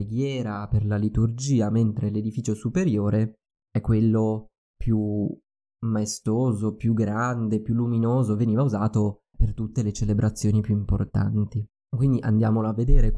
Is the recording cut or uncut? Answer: cut